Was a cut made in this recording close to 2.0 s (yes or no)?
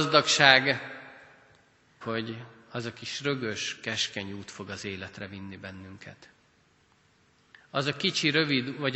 yes